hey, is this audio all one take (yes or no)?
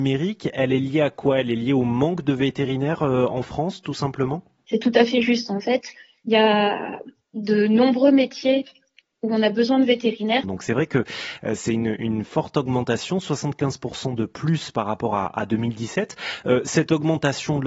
no